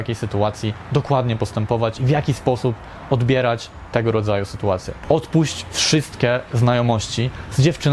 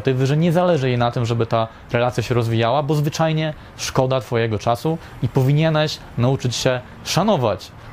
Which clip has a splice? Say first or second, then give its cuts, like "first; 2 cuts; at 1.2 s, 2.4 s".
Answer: first; 1 cut; at 5.0 s